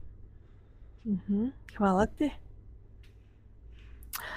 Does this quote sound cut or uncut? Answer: uncut